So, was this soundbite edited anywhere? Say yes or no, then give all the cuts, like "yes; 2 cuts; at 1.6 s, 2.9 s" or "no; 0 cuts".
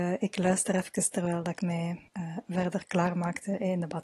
yes; 1 cut; at 2.1 s